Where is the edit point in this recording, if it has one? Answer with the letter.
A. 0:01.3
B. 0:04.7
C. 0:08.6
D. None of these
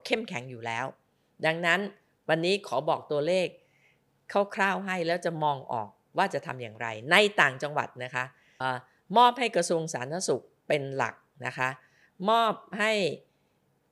C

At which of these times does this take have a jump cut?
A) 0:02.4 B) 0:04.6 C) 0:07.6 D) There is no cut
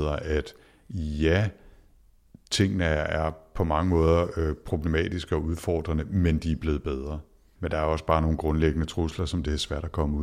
C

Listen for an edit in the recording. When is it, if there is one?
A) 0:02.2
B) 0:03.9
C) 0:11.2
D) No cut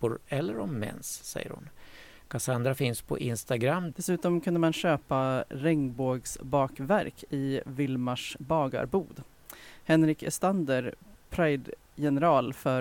B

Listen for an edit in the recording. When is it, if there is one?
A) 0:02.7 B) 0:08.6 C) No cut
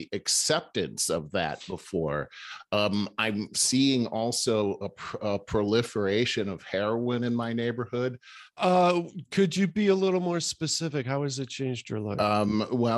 B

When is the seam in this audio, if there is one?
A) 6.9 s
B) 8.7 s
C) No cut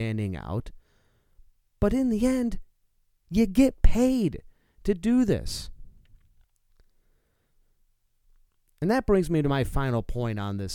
C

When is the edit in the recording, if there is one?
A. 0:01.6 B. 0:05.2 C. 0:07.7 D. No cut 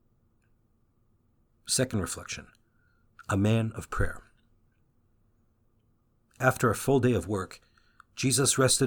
D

